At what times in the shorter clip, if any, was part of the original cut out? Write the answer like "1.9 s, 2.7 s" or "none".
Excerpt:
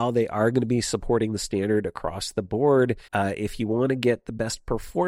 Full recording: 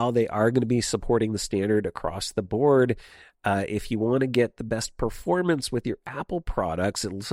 3.1 s